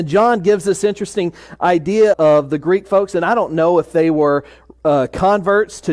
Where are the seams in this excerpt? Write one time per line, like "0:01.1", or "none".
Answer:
0:02.1